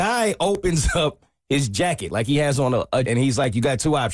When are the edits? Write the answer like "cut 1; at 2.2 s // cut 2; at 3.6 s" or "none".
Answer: cut 1; at 3.0 s